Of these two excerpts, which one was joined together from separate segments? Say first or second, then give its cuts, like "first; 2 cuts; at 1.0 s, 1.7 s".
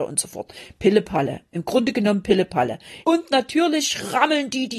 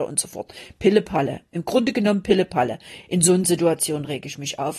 first; 1 cut; at 3.0 s